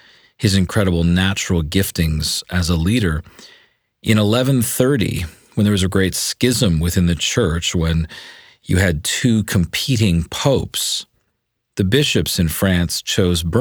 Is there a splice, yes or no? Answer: no